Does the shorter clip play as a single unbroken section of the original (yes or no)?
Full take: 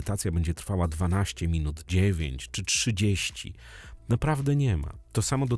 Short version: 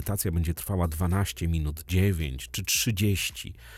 yes